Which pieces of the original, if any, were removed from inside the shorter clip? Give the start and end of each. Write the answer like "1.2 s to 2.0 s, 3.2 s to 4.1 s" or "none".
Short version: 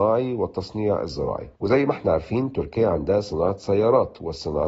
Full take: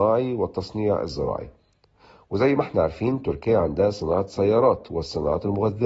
1.6 s to 2.3 s